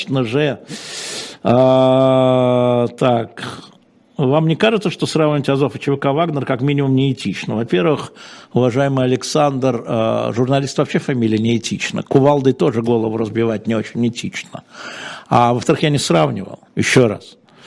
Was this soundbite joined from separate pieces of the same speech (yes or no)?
yes